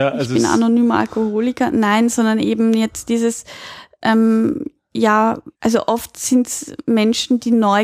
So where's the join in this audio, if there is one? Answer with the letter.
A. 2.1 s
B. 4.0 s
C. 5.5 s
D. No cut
C